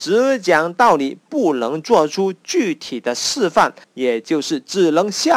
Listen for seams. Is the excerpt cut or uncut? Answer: cut